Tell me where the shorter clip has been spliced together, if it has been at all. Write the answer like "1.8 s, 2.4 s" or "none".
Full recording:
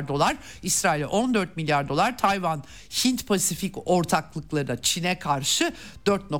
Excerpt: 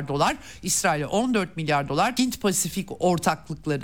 2.2 s